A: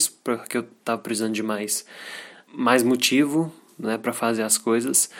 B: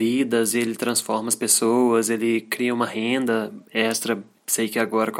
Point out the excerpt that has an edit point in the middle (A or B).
A